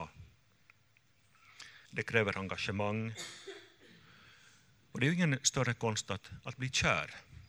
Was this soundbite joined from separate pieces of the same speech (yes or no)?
yes